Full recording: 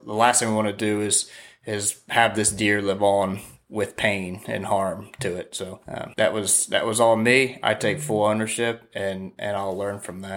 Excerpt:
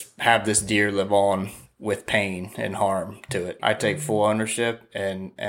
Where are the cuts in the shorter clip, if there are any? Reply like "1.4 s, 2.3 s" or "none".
3.6 s